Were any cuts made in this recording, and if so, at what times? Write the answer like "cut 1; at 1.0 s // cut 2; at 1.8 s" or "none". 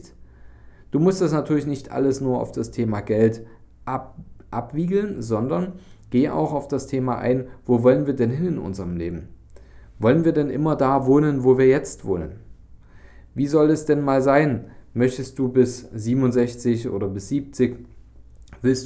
none

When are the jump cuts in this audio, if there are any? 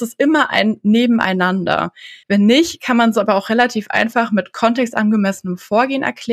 cut 1; at 2.2 s

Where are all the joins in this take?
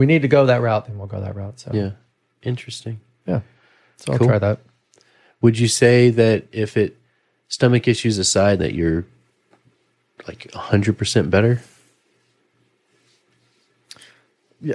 cut 1; at 8.6 s

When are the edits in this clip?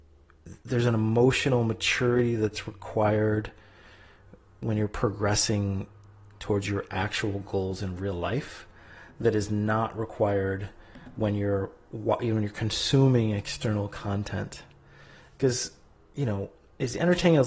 none

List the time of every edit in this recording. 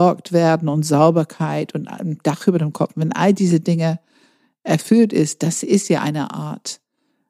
none

